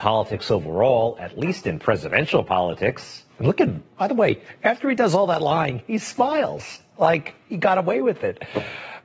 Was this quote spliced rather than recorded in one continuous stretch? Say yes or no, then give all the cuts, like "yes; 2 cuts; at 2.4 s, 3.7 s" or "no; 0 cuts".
no; 0 cuts